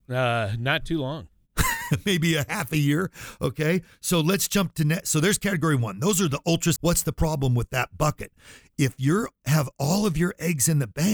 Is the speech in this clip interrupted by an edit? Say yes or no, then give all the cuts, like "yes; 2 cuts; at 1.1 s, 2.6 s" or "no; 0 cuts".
yes; 1 cut; at 6.8 s